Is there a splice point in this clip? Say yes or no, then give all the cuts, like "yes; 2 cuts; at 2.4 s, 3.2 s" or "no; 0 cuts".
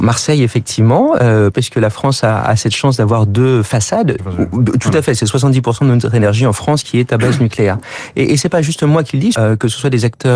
yes; 3 cuts; at 1.5 s, 4.2 s, 9.3 s